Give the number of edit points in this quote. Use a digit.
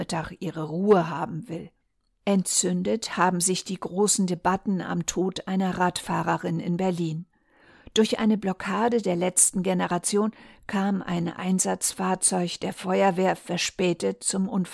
1